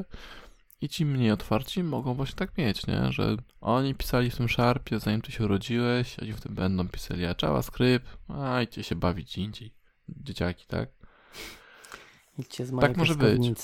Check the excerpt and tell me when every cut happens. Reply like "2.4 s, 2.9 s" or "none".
3.5 s